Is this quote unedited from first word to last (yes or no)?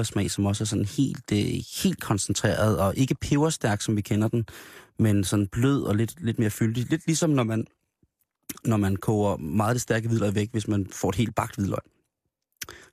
yes